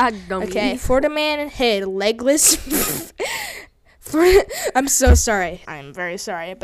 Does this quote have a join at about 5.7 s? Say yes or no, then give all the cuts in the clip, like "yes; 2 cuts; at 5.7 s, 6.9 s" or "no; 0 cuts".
yes; 1 cut; at 5.7 s